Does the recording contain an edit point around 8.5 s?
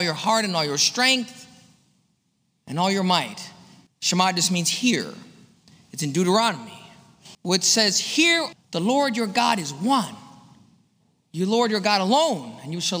yes; 3 cuts; at 3.9 s, 7.3 s, 8.5 s

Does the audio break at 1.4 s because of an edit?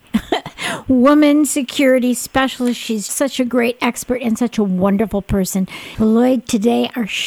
no; 2 cuts; at 3.1 s, 5.9 s

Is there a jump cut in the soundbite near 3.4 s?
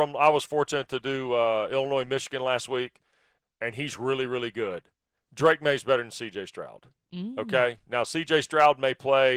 yes; 1 cut; at 3.4 s

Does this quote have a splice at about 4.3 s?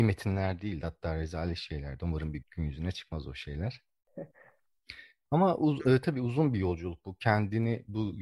yes; 2 cuts; at 2.4 s, 4.3 s

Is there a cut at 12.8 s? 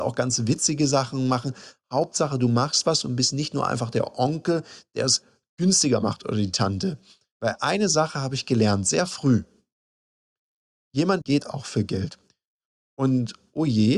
no; 1 cut; at 11.2 s

